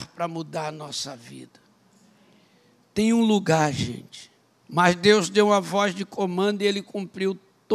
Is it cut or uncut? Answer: cut